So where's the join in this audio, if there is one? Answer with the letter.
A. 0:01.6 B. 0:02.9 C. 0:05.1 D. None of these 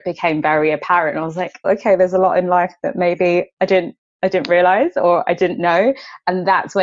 A